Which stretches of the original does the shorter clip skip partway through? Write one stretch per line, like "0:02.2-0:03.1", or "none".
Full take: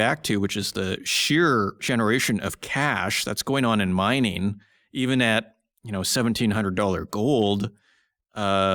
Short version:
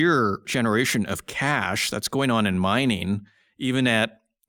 none